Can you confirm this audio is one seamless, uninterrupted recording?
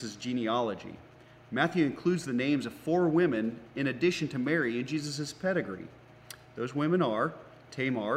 yes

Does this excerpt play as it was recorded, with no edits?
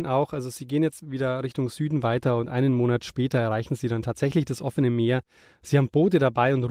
yes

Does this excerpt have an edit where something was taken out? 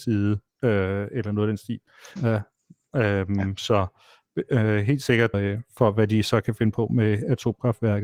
yes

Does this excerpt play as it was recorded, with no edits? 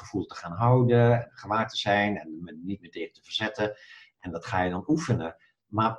yes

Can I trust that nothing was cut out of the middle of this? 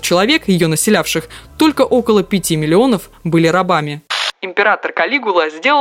yes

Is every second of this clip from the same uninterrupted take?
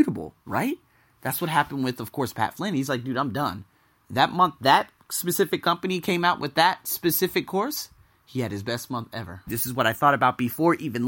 no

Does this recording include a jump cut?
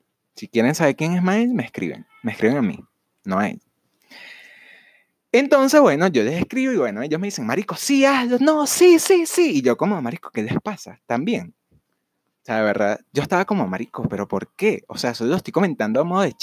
no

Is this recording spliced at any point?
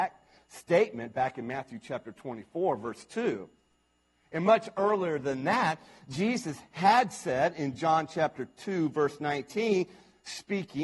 no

